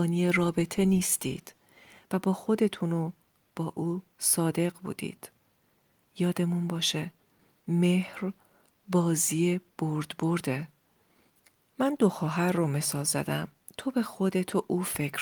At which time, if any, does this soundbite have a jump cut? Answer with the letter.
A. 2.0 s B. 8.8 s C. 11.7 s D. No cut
D